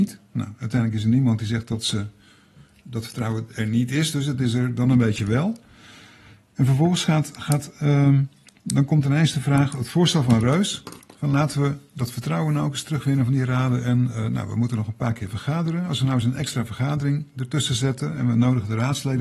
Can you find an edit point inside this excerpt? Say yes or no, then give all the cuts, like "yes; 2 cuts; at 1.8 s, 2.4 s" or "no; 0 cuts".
no; 0 cuts